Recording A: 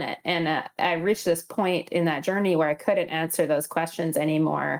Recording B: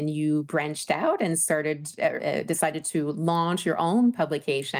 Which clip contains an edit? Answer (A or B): B